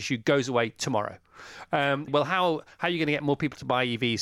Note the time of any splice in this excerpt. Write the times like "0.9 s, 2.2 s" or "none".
2.1 s